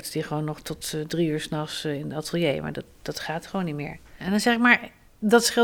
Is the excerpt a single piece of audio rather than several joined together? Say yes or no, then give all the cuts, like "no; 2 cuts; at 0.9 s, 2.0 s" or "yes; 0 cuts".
no; 1 cut; at 4.2 s